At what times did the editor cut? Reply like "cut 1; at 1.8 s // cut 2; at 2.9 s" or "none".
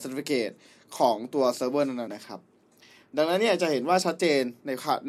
cut 1; at 2.1 s